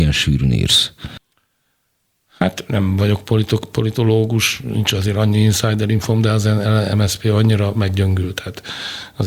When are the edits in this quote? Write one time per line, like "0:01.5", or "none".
none

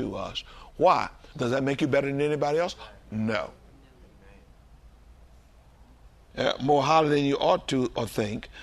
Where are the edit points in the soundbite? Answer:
0:01.3
0:06.3

